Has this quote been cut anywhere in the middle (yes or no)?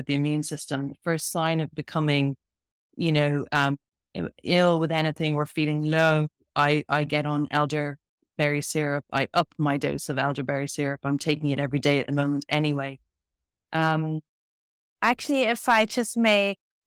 no